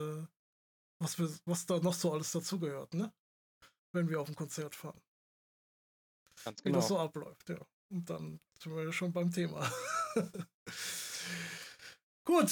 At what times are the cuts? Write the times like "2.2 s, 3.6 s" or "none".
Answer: none